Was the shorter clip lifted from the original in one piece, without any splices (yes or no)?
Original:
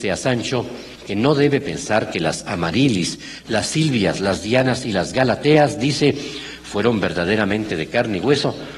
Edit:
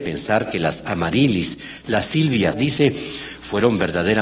no